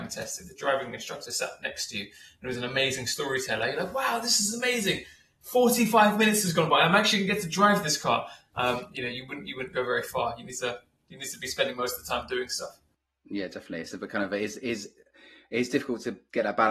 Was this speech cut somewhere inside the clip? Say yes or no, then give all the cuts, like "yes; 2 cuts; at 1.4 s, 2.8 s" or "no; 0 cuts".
no; 0 cuts